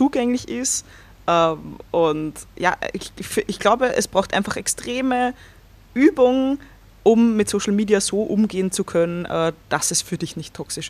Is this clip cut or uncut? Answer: uncut